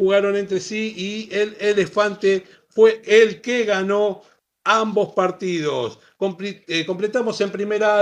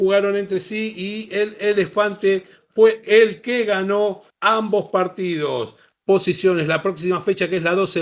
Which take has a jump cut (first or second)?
second